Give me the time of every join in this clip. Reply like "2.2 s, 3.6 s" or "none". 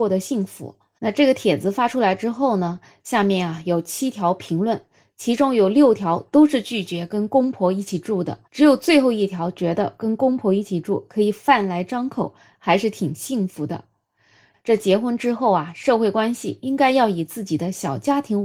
1.0 s, 8.5 s, 14.5 s